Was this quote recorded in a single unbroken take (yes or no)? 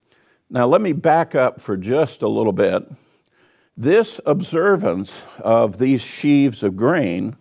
yes